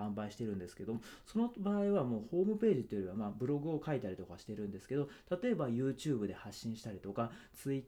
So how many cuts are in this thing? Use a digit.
0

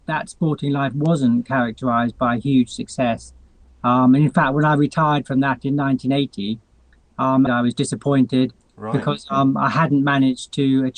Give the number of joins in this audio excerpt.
1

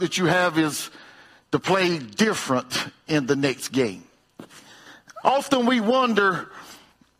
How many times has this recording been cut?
1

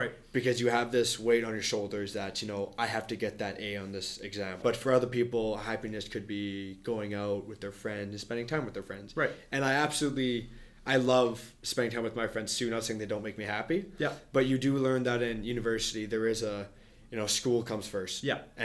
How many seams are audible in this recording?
1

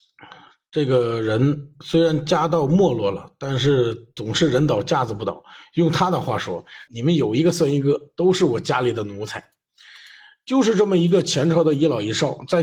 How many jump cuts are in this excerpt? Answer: 1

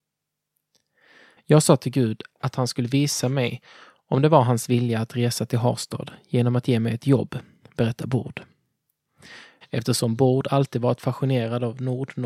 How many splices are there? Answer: 2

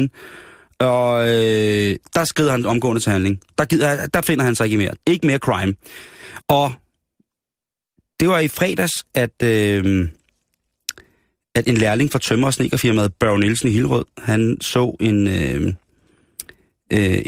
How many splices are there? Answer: 2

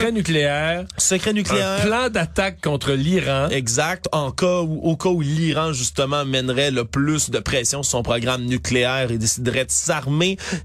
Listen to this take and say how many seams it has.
0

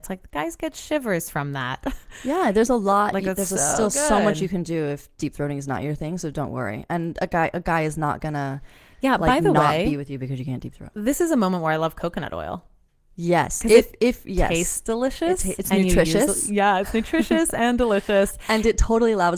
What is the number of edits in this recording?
0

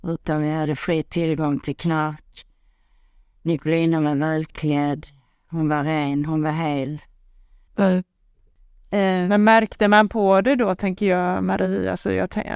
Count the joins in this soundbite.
1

